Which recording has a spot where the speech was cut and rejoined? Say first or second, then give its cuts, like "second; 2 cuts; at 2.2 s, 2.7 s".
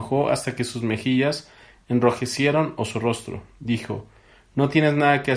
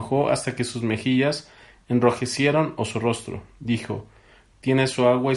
second; 1 cut; at 4.5 s